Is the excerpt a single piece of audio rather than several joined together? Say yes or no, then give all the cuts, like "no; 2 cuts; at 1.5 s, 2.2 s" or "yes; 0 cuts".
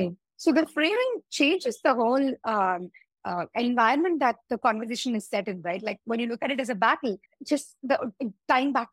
no; 1 cut; at 7.3 s